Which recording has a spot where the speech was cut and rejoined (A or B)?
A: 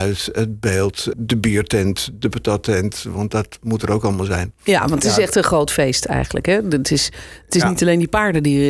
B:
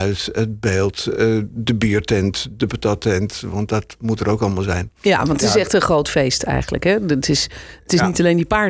A